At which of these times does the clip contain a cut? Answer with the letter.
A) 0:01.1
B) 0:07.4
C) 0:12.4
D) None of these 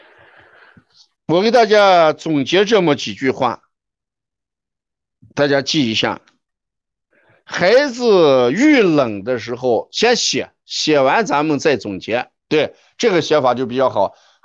C